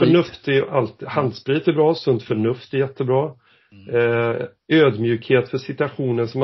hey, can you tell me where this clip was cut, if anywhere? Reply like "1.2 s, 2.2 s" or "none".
none